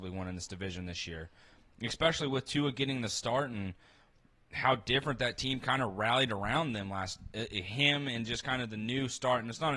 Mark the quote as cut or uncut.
uncut